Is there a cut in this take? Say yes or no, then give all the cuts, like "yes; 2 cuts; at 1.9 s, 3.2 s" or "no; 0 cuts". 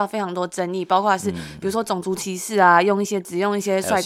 no; 0 cuts